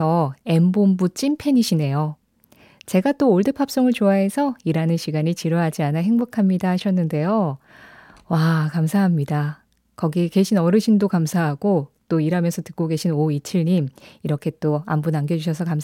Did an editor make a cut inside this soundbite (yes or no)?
no